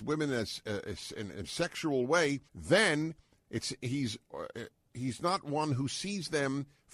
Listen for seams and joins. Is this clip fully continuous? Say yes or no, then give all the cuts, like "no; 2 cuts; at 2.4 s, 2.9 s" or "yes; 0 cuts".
no; 1 cut; at 2.5 s